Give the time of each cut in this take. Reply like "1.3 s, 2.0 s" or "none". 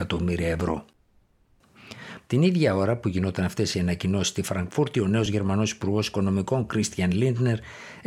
2.2 s